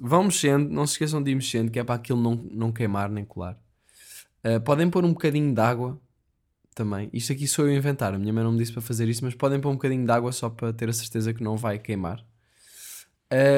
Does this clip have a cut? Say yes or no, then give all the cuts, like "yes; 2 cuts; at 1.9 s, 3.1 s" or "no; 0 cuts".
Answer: no; 0 cuts